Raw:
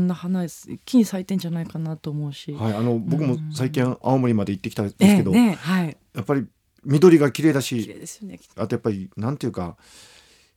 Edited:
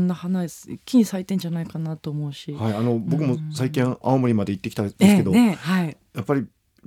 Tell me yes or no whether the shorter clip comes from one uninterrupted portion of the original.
yes